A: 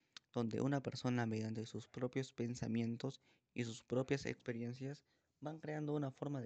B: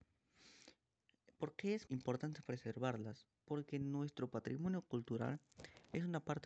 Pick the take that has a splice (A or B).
B